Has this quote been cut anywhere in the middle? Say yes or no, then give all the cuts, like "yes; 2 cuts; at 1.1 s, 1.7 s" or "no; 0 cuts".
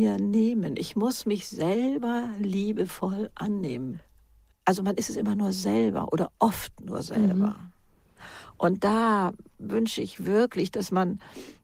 yes; 1 cut; at 4.5 s